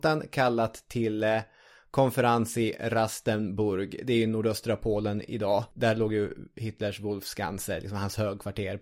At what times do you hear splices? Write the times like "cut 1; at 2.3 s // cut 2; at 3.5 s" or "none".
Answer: none